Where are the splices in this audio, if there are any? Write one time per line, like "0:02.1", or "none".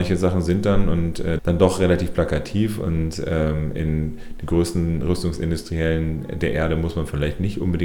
0:01.4